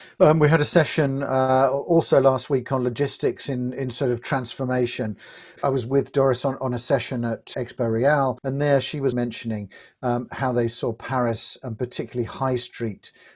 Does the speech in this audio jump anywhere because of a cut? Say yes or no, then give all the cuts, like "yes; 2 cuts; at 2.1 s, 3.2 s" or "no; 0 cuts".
yes; 2 cuts; at 5.6 s, 9.1 s